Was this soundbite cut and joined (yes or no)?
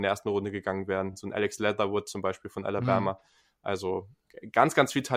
no